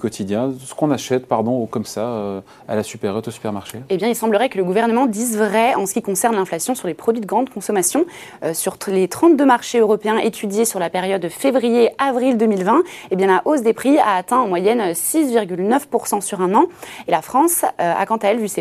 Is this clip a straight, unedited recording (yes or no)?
yes